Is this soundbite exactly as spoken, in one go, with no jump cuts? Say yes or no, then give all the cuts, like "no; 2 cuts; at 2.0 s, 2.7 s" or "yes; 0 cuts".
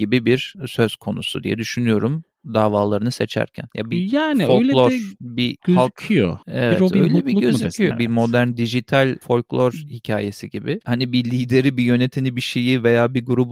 no; 2 cuts; at 7.9 s, 10.8 s